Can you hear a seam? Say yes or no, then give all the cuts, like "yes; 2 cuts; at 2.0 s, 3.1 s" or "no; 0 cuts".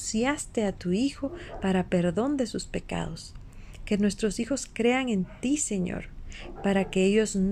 yes; 1 cut; at 6.6 s